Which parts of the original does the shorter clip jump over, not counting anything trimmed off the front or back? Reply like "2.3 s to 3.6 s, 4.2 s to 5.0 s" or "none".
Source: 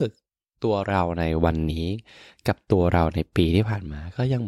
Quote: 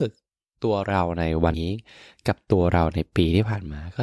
1.5 s to 1.7 s